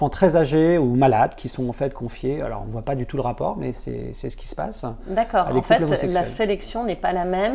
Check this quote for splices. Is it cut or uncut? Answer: uncut